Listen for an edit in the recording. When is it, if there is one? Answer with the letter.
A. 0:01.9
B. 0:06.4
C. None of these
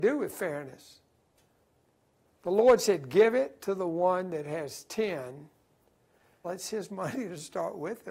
B